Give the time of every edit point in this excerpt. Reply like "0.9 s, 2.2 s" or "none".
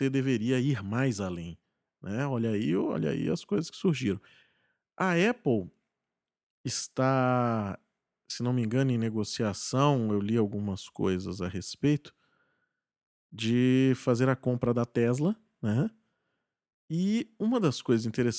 none

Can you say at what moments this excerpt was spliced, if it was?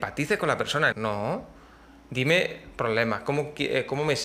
0.9 s

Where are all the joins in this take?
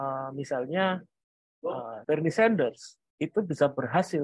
2.0 s

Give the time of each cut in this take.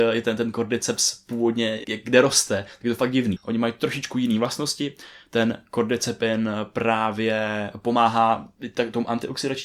1.8 s, 3.4 s

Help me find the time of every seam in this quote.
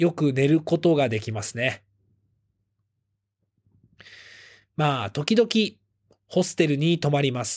none

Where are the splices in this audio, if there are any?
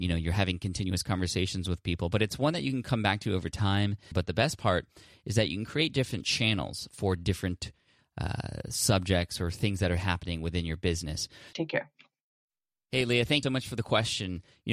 4.1 s, 11.5 s, 13.4 s

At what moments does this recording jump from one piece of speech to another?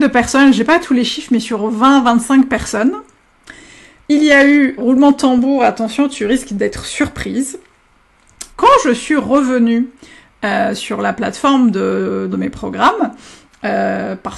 4.8 s, 8.5 s, 12.3 s

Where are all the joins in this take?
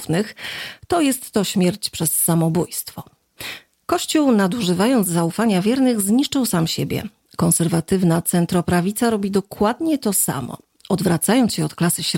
none

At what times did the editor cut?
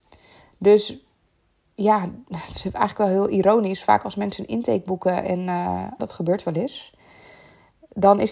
6.0 s

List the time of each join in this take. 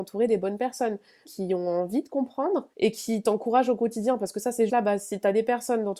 1.2 s, 2.7 s, 4.7 s

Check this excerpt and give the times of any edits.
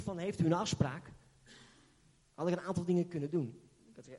none

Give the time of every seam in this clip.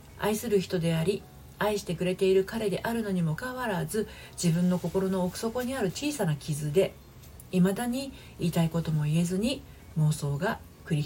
3.4 s

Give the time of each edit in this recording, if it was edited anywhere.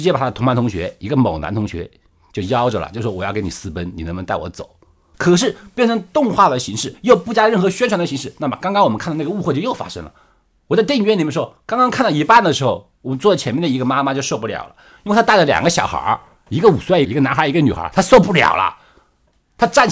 5.1 s, 17.0 s

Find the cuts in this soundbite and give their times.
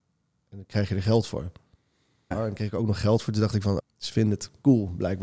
2.3 s, 3.8 s

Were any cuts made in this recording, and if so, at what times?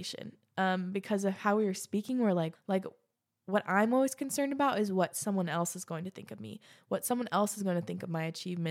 2.5 s

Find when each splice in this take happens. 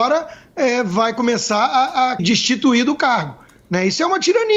2.2 s

